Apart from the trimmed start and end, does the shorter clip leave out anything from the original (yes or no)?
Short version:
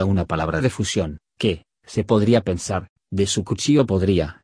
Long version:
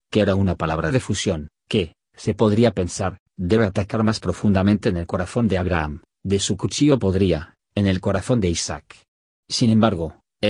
yes